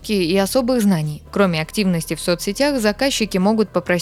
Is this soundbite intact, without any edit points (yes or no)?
no